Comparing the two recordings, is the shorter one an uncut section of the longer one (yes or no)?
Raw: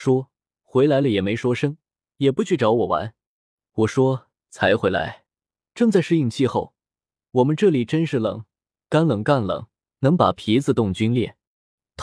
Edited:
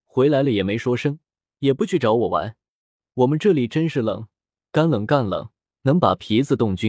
no